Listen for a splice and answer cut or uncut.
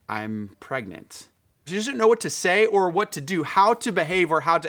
cut